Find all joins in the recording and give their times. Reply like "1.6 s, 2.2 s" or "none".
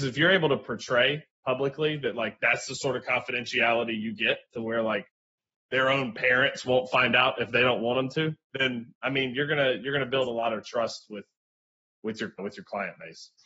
8.5 s, 12.4 s